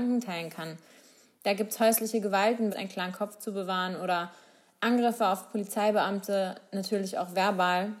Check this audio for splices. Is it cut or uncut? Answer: cut